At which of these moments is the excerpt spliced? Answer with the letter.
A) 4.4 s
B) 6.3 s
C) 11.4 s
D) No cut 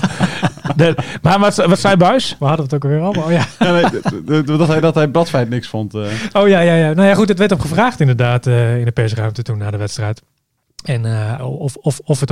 C